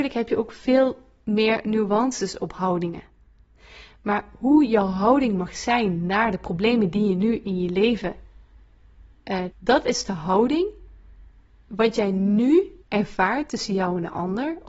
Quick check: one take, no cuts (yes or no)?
no